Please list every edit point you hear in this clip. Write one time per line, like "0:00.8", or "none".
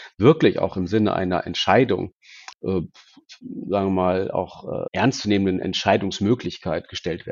0:02.5
0:04.9

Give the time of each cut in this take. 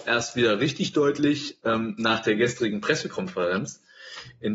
none

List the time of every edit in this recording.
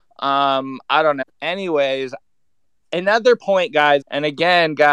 0:01.2
0:04.0

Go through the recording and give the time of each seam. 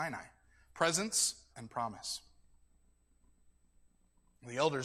0:01.5

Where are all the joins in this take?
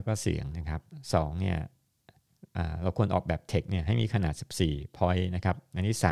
none

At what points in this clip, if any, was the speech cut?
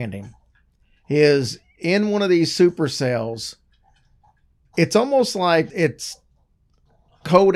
0:05.7

